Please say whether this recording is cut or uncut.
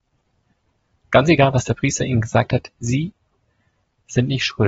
uncut